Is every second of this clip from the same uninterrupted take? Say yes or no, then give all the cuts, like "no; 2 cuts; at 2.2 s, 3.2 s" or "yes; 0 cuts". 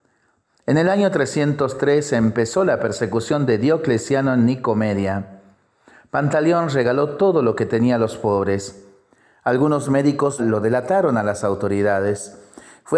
no; 1 cut; at 10.4 s